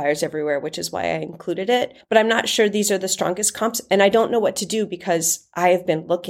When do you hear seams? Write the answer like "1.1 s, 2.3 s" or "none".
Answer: none